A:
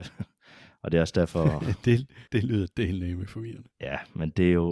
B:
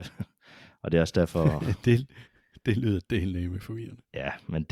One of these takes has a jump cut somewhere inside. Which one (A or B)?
A